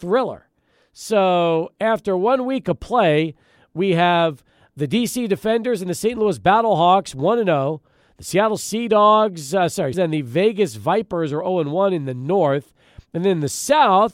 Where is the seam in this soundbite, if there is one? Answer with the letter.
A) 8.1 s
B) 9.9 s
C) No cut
B